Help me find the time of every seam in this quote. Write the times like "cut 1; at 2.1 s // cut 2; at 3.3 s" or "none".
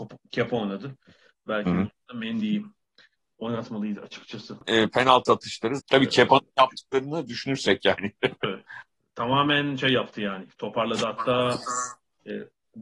cut 1; at 5.8 s